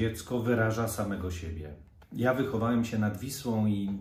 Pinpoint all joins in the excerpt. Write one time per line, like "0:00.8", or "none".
0:02.0